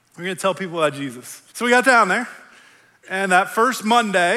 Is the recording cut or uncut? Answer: cut